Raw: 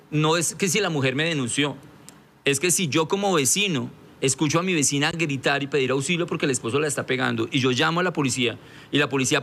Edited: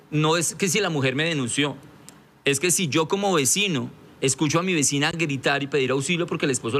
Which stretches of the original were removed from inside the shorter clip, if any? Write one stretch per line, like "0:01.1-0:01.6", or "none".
none